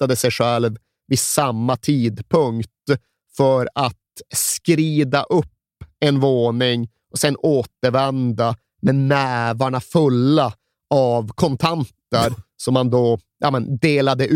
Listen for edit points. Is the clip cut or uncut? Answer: uncut